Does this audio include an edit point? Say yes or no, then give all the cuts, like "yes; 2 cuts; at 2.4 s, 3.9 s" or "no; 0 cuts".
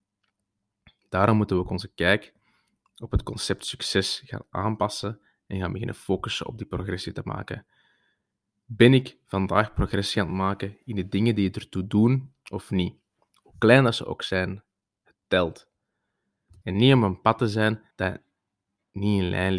yes; 2 cuts; at 16.6 s, 17.9 s